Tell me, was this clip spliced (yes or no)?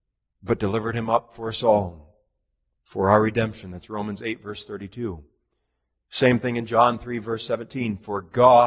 no